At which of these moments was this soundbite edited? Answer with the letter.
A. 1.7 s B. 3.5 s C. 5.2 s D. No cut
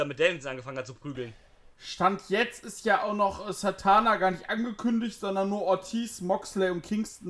A